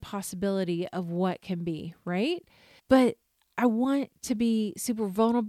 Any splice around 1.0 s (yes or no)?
no